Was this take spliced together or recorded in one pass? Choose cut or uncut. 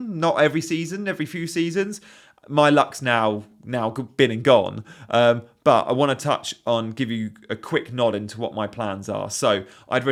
uncut